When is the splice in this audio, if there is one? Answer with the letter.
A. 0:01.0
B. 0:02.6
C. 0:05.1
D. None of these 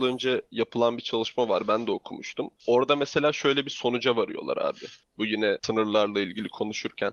D